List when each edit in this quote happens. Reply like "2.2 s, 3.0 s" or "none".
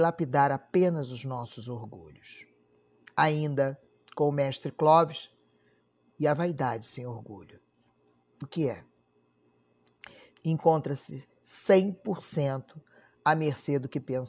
10.3 s